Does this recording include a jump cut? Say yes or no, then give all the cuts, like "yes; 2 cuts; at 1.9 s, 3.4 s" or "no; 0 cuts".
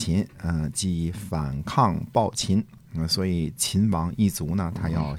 no; 0 cuts